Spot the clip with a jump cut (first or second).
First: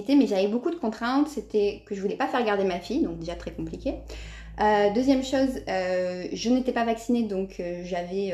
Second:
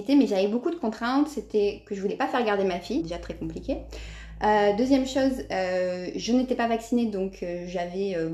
second